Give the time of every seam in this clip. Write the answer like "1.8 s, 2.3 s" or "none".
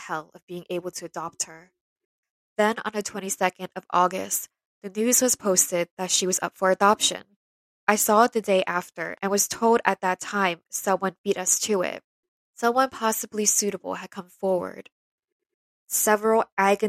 none

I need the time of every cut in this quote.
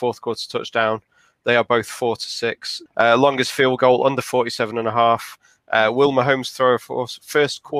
2.9 s

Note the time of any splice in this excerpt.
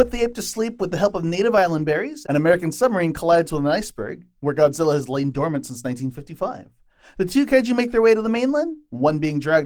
2.2 s

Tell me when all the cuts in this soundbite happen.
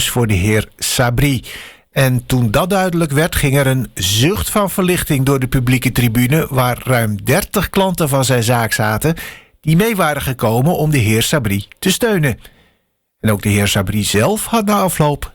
none

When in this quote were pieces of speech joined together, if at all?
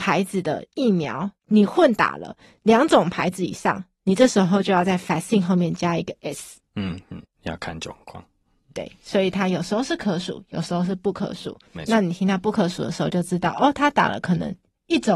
1.4 s, 7.3 s

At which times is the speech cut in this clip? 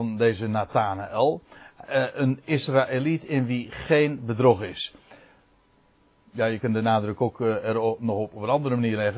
none

